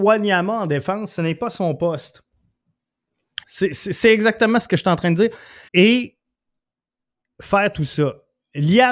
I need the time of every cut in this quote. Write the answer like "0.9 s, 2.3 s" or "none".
3.4 s, 5.7 s